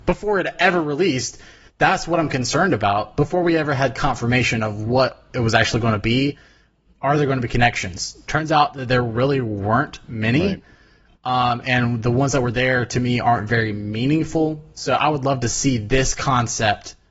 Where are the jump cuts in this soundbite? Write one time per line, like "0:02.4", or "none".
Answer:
none